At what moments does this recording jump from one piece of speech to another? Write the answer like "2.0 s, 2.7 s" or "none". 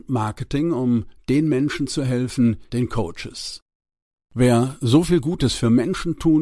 2.7 s